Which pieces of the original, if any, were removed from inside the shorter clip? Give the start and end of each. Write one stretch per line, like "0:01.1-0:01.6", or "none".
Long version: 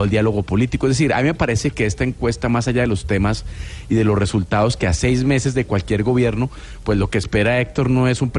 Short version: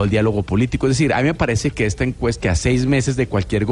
0:02.4-0:04.8